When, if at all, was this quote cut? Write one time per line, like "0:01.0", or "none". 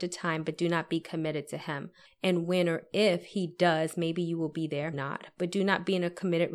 0:02.0
0:04.9